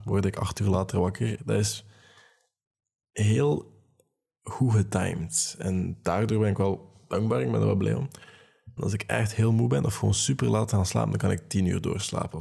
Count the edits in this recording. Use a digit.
2